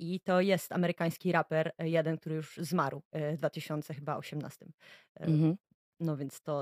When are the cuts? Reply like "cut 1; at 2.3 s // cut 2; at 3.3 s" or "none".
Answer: none